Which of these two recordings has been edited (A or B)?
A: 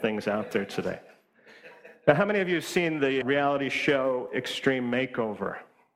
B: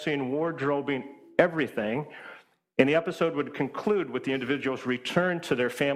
A